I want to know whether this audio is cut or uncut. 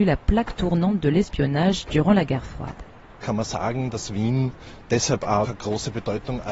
cut